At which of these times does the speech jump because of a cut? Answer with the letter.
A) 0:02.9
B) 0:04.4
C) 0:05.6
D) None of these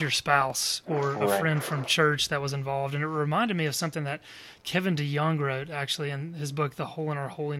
D